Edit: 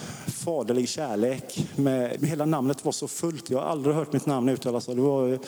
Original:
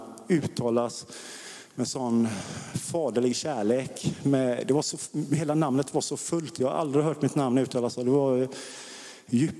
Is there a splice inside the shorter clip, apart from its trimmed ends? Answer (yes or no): yes